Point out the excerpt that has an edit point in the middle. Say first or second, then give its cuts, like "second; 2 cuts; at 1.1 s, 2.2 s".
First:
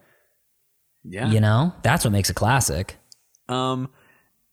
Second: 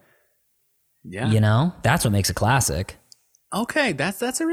first; 1 cut; at 3.5 s